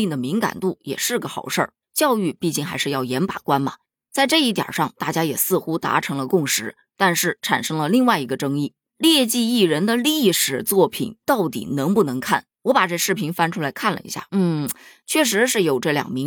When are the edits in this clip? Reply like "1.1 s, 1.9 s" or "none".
12.6 s, 14.3 s